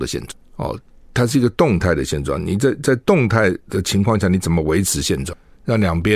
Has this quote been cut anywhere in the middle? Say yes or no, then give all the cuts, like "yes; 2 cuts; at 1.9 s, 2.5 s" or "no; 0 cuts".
no; 0 cuts